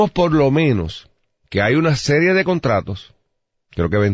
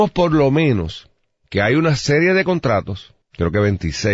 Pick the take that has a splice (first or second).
second